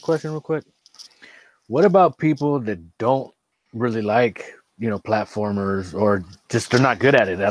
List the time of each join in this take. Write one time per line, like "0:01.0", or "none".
none